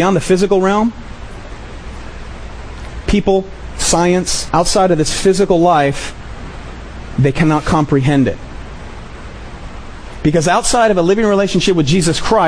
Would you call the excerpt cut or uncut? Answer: cut